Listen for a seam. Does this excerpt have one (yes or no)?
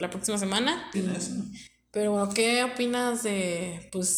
yes